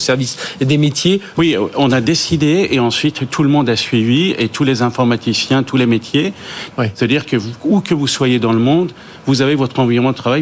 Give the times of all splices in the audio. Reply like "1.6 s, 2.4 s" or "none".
1.3 s, 6.7 s